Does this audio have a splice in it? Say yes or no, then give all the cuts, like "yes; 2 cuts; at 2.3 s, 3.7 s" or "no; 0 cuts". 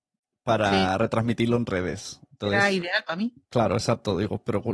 no; 0 cuts